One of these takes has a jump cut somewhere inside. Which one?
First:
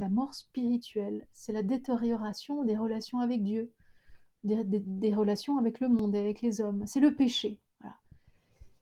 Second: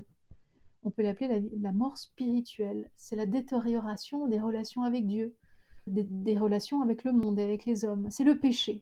second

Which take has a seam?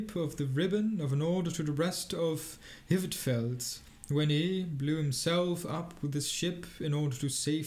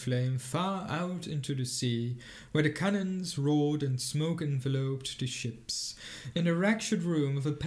second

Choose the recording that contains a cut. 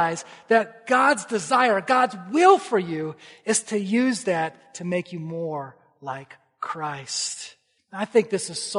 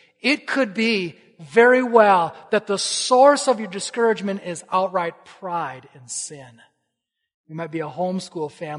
first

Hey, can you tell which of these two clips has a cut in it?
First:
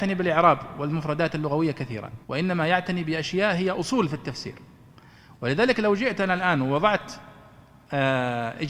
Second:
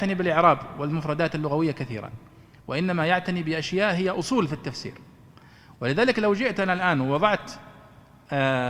first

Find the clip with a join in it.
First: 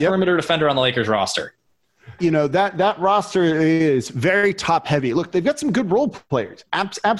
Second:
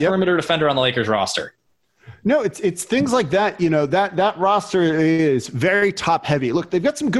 first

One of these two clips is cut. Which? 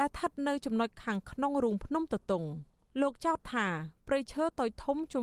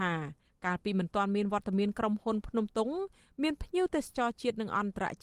second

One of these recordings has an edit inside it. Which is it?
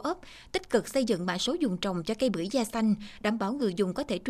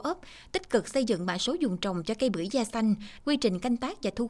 second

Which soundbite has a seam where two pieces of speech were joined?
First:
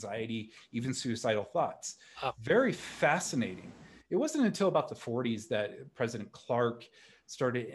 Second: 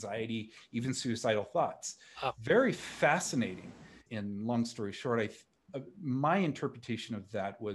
second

